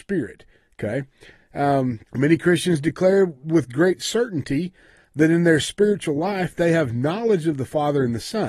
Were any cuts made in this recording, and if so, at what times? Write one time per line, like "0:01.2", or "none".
0:02.1